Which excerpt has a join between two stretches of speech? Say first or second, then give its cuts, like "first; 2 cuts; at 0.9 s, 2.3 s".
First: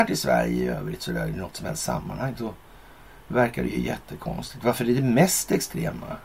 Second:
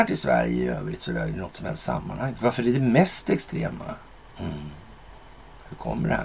second; 2 cuts; at 2.4 s, 4.2 s